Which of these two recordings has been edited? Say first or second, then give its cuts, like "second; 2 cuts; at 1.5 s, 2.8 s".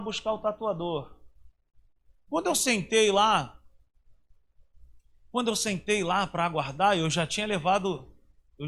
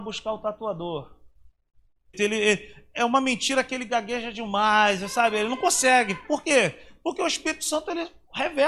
second; 1 cut; at 2.1 s